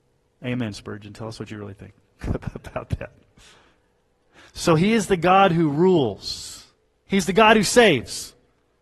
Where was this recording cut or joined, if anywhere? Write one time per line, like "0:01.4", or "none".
0:07.1